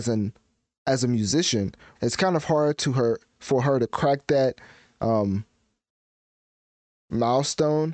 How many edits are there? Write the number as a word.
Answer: one